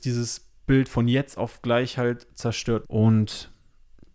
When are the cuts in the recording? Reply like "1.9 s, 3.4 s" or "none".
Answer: 2.8 s